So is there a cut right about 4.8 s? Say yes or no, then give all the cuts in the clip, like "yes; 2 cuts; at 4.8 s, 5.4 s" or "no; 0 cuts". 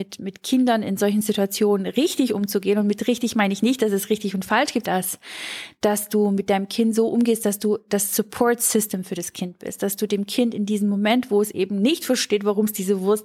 yes; 1 cut; at 4.8 s